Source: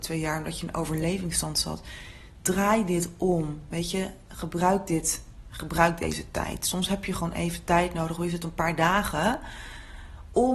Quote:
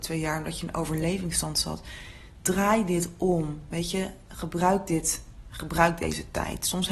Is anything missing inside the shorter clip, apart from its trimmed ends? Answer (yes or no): no